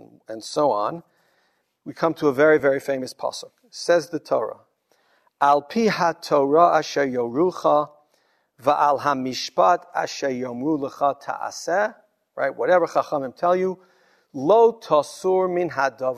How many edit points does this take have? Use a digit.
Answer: 0